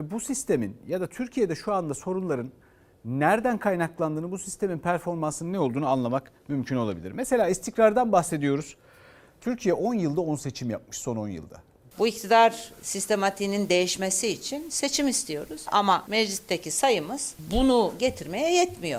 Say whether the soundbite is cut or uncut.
cut